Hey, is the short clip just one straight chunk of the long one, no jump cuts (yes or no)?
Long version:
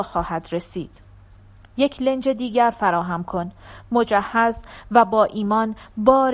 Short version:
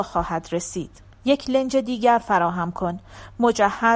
no